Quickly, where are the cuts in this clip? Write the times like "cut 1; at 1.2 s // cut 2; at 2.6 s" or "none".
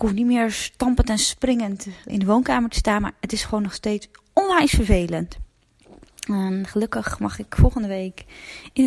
cut 1; at 2.1 s

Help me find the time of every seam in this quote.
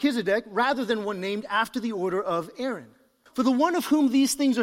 cut 1; at 3.3 s

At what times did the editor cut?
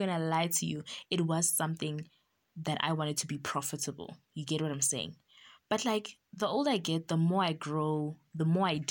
none

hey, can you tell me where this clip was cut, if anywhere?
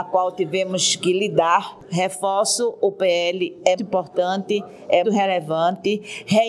cut 1; at 3.8 s // cut 2; at 5.0 s

